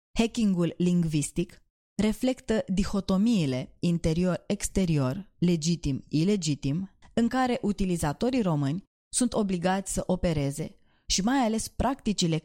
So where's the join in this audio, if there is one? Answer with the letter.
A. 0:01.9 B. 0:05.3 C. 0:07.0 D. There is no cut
C